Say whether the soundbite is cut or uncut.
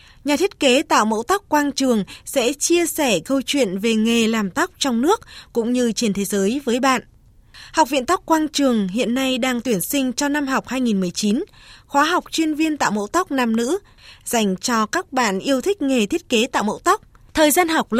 uncut